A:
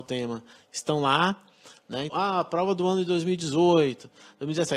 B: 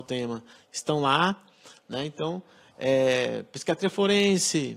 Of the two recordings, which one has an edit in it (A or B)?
A